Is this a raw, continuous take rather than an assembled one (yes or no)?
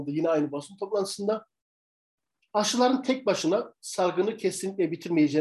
yes